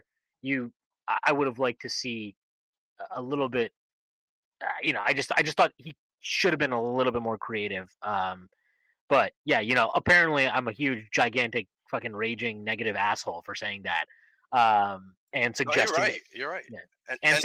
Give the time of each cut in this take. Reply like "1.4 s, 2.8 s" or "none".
none

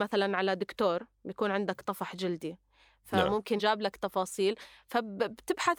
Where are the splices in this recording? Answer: 3.6 s

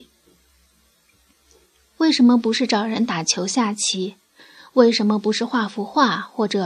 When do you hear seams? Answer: none

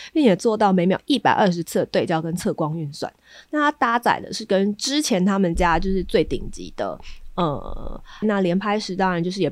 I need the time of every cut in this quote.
8.2 s

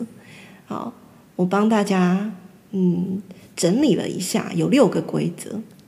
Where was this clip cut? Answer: none

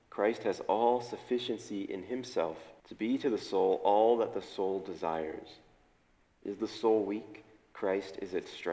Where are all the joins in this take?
2.8 s

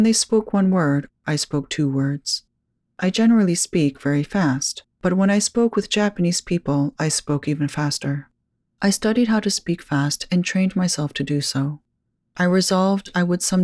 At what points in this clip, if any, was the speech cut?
none

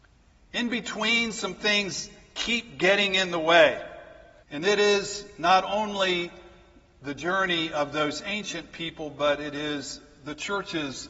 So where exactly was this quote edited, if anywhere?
4.4 s

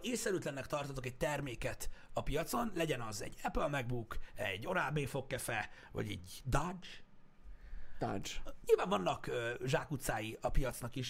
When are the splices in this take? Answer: 8.6 s

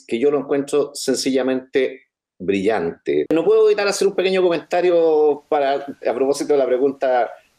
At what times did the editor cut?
3.3 s, 6.0 s

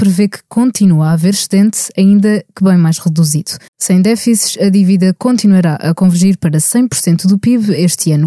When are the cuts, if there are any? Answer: 3.7 s

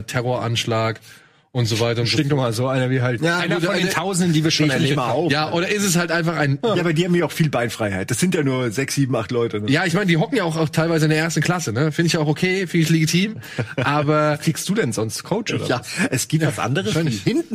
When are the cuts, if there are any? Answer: 3.4 s, 6.7 s

